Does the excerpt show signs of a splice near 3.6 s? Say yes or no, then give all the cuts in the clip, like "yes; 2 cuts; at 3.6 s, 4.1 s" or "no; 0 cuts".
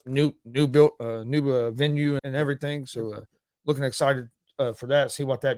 no; 1 cut; at 2.2 s